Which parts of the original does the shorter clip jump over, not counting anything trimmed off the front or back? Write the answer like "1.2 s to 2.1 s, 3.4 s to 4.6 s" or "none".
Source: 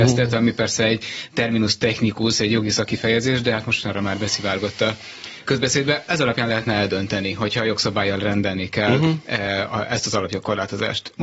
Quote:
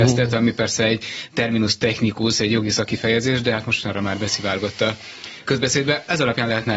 none